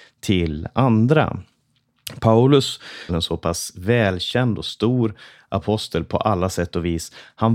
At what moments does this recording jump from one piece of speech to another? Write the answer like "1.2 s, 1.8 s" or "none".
3.1 s